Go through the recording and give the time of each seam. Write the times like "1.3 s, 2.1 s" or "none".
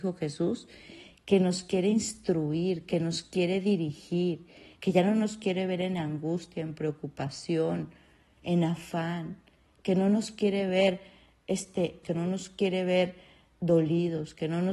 12.0 s